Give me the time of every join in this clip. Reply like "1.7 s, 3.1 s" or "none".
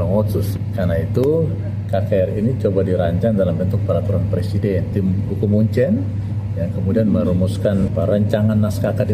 7.9 s